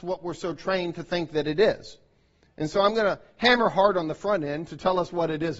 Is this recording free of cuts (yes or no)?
yes